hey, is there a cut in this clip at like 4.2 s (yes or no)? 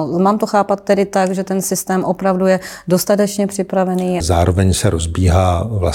yes